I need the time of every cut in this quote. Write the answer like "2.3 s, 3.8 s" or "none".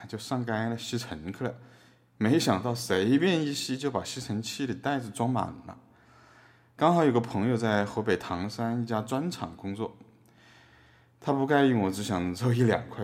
none